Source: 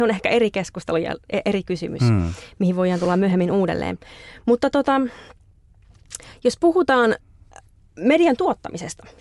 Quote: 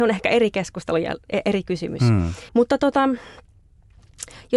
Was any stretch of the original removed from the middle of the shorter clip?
yes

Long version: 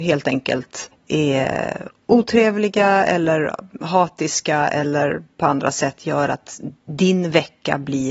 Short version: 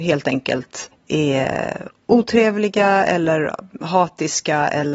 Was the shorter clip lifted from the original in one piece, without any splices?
yes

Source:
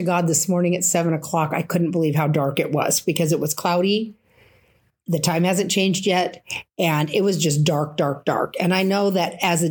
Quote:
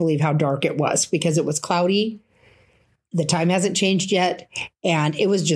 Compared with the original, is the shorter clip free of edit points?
yes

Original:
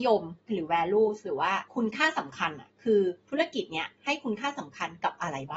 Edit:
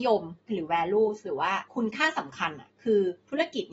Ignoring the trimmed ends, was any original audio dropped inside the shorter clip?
no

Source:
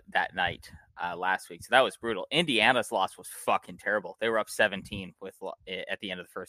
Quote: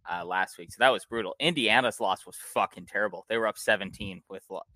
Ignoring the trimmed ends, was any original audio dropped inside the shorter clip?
no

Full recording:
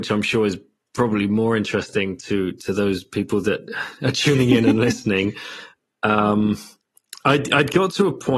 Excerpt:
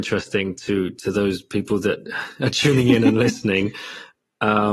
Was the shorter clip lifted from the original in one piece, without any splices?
yes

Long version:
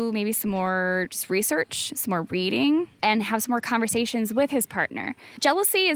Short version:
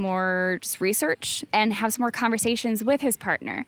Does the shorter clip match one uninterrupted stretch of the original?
no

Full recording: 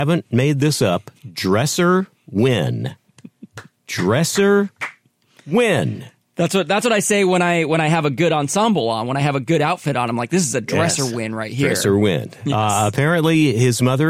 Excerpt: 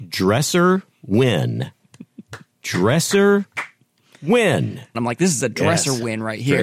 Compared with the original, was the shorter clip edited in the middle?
yes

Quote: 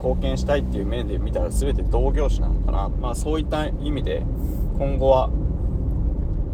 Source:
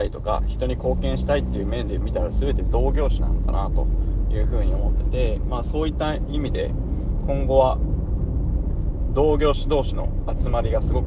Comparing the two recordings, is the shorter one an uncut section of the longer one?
no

